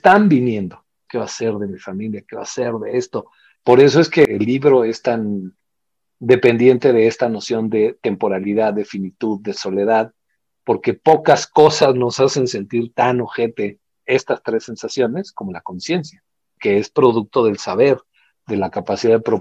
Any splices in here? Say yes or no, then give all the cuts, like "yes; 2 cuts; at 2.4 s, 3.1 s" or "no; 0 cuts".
yes; 2 cuts; at 1.1 s, 3.6 s